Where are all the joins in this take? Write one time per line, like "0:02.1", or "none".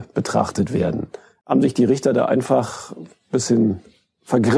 none